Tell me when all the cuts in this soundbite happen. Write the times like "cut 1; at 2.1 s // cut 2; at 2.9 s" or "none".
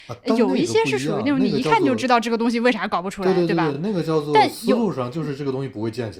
none